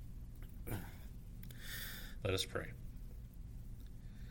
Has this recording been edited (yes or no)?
yes